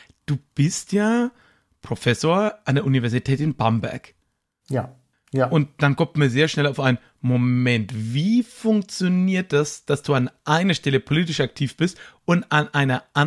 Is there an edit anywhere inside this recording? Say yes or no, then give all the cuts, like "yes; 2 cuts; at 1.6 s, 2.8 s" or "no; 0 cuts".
yes; 1 cut; at 5.1 s